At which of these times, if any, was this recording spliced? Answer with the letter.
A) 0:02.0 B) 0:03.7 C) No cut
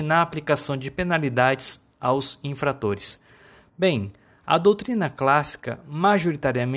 B